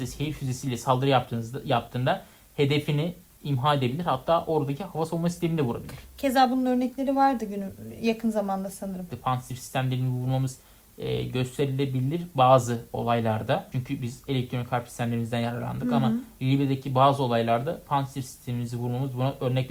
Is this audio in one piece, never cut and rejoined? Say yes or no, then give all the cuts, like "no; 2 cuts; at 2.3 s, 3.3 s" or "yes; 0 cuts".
no; 1 cut; at 9.1 s